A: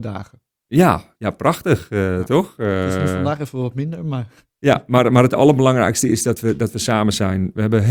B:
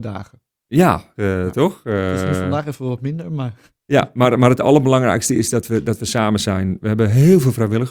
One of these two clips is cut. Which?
B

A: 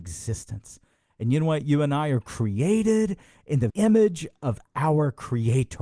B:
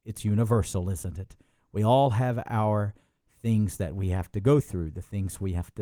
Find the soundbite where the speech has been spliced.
A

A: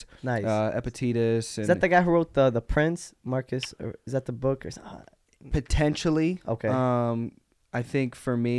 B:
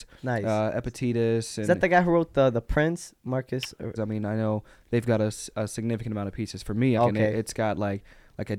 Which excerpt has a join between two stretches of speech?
B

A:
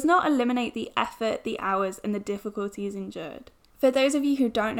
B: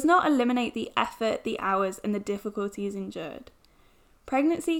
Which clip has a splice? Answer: A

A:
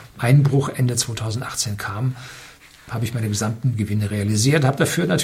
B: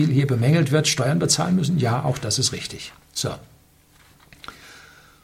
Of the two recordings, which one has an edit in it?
B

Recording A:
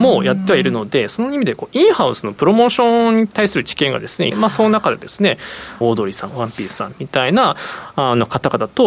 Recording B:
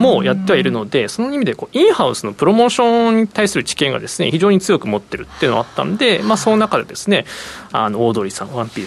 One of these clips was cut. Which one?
A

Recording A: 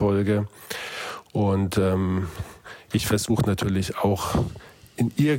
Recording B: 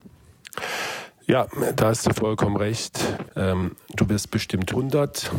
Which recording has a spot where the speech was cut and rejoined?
B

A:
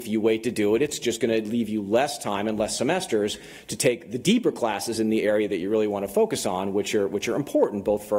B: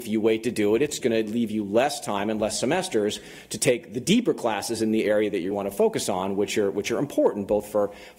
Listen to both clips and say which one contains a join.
B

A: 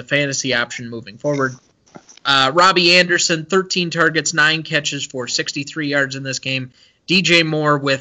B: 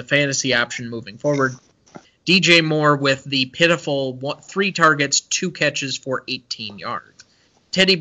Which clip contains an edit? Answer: B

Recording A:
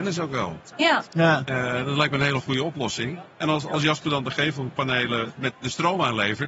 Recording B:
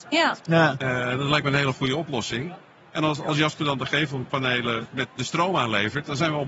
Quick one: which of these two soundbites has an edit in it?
A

